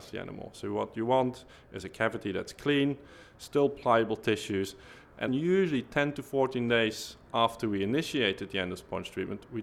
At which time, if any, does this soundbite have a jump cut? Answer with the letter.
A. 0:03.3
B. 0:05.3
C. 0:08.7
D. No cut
B